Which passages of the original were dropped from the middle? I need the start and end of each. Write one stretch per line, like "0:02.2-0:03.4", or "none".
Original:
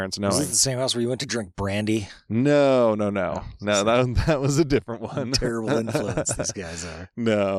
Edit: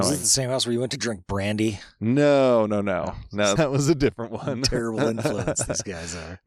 0:03.8-0:04.3